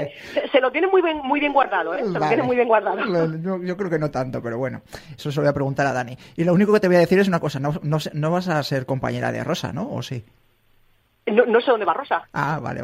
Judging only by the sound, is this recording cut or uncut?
cut